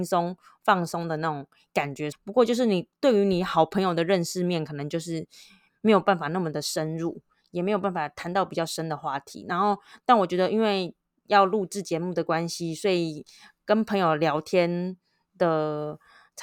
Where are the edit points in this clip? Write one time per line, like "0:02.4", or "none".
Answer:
0:02.1